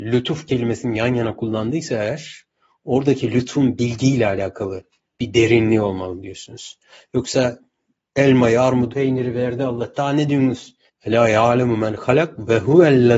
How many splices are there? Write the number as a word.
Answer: two